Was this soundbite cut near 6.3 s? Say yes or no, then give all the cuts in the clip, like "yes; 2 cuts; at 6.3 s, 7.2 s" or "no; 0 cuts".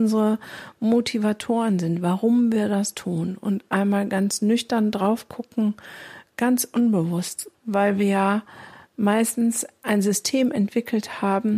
yes; 2 cuts; at 6.3 s, 7.5 s